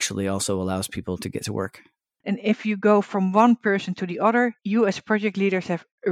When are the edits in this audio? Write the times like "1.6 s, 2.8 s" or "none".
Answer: 2.2 s, 4.6 s